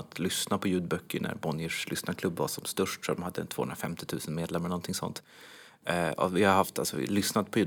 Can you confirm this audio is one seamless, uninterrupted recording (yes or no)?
yes